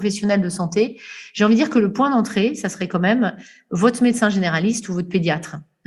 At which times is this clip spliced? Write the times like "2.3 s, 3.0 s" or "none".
none